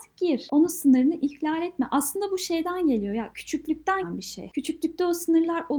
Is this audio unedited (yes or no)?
no